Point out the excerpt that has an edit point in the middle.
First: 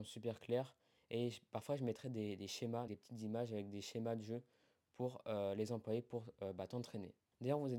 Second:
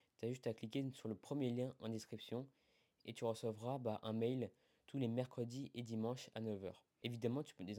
first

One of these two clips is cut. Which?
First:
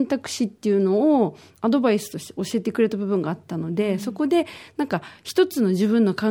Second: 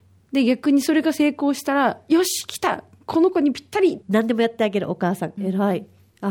second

